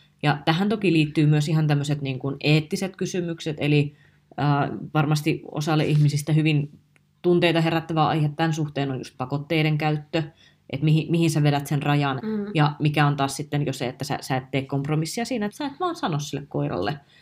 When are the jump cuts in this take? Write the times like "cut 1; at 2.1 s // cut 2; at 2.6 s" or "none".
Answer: cut 1; at 12.2 s // cut 2; at 15.5 s